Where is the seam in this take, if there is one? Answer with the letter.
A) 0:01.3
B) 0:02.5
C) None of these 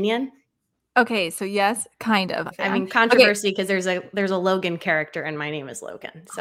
B